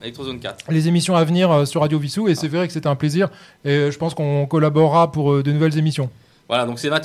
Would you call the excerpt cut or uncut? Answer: uncut